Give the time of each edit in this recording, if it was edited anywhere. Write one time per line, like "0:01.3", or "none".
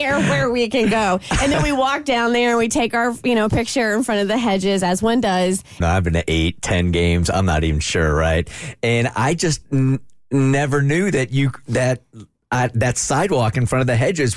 0:05.8